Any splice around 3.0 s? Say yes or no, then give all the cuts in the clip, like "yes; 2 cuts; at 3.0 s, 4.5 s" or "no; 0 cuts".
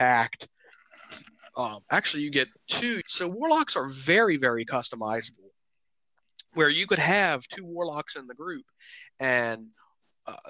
yes; 2 cuts; at 1.8 s, 3.0 s